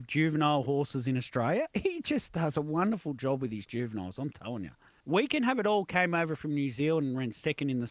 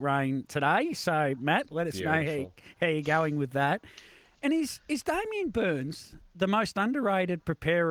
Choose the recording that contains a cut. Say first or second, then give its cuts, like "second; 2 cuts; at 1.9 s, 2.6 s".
first; 1 cut; at 5.0 s